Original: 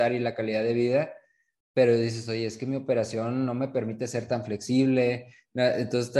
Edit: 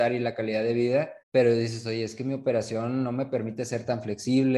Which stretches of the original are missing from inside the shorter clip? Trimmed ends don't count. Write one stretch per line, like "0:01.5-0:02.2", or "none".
0:01.2-0:01.6